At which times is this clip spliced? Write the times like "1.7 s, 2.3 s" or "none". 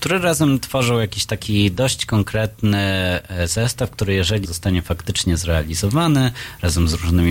4.4 s